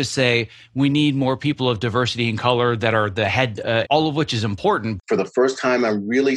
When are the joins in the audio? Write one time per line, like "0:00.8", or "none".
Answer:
0:03.8
0:05.0